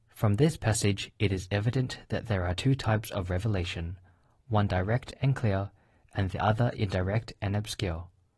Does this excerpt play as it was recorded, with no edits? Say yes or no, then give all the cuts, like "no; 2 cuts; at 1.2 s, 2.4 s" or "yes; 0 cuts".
yes; 0 cuts